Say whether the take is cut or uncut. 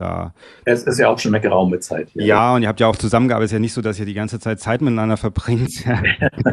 uncut